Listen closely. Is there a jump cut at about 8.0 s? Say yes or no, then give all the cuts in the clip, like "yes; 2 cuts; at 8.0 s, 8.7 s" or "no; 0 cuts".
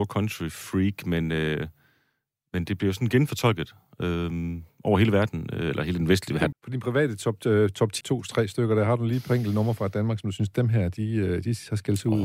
yes; 2 cuts; at 6.5 s, 8.0 s